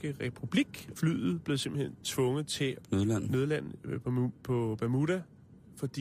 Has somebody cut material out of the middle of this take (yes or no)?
no